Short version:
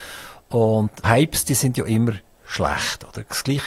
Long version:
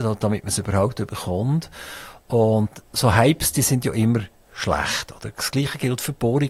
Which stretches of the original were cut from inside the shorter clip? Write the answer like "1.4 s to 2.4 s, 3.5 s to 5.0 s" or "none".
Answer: 2.8 s to 3.1 s